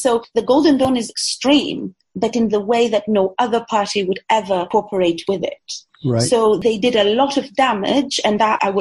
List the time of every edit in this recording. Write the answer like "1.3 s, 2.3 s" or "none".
none

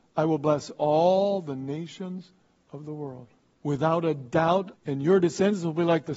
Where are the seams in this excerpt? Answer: 3.5 s, 4.7 s

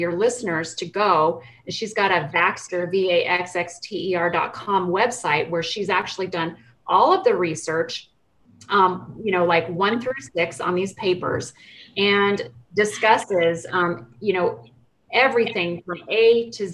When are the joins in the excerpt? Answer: none

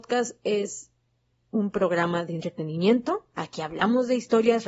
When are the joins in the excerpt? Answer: none

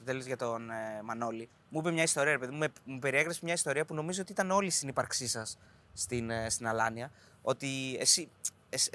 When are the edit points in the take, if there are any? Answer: none

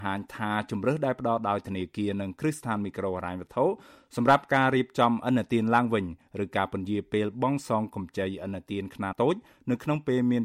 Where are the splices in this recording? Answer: 9.1 s

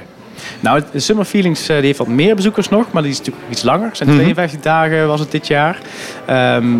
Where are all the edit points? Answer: none

